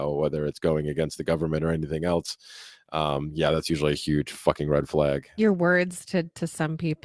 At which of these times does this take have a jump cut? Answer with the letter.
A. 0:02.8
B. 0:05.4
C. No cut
B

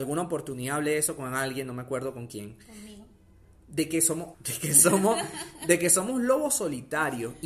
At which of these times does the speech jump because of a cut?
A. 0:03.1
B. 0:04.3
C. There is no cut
B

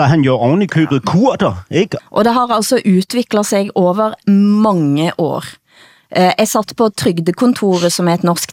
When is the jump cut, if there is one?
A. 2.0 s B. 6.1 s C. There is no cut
A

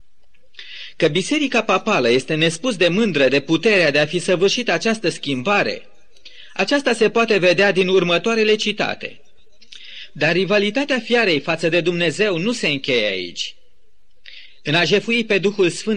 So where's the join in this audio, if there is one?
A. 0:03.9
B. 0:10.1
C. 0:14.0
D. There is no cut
B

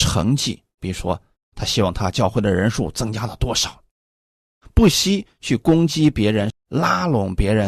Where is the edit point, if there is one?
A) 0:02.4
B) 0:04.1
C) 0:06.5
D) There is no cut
C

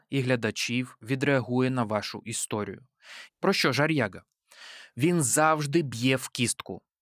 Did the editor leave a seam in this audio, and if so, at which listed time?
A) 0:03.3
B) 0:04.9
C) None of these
A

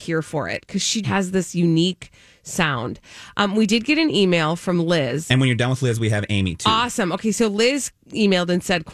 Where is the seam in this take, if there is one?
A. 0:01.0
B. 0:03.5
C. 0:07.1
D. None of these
A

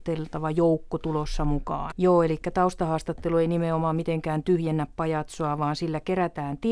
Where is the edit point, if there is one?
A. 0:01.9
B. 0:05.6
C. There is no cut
A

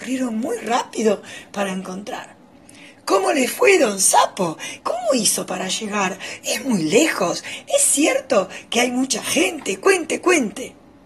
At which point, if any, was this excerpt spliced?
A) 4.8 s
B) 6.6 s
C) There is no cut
A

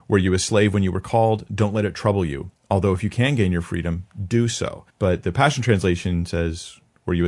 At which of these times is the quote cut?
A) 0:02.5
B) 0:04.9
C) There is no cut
B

